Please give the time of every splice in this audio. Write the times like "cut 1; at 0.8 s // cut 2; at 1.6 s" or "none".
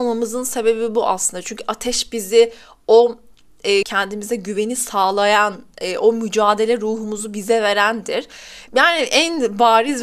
cut 1; at 3.8 s // cut 2; at 8.7 s